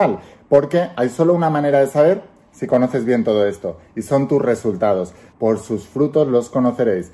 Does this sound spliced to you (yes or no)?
yes